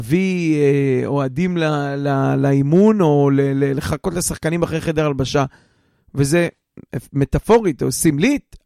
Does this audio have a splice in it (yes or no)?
no